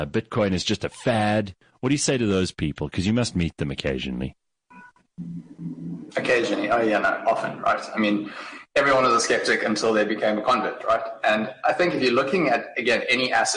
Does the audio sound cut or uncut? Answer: uncut